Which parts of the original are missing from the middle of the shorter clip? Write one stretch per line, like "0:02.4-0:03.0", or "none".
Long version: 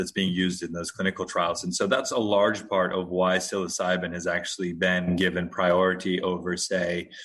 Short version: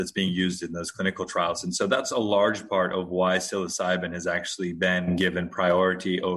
none